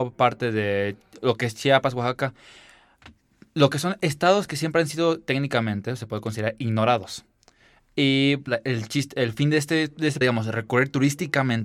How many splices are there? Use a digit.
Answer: 2